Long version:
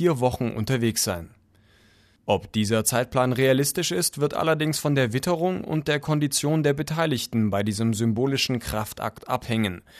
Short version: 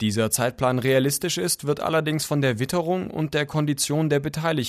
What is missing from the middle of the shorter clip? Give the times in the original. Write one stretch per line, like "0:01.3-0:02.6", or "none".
none